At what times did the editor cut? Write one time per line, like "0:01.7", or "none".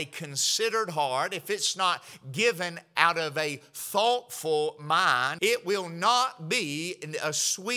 0:05.4